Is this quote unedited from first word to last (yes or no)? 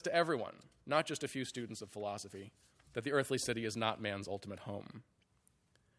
yes